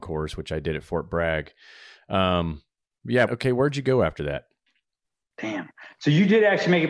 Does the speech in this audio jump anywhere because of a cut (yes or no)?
yes